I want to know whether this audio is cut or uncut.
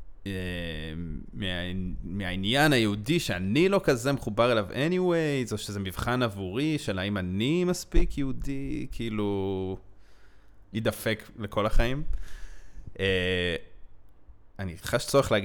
cut